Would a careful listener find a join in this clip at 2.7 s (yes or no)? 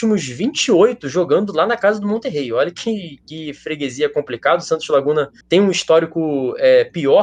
no